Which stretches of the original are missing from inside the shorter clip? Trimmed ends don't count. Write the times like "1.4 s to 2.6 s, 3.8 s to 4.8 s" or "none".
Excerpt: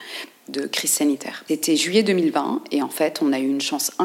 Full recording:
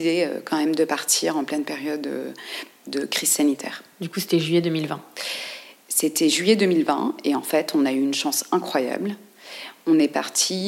3.9 s to 6.0 s